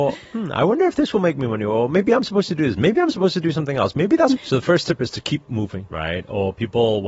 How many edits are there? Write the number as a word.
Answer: two